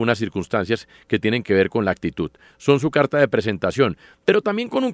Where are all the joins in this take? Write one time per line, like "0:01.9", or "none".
0:02.5